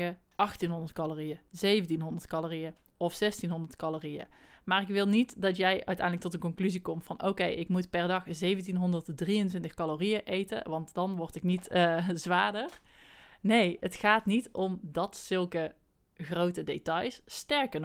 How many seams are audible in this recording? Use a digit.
0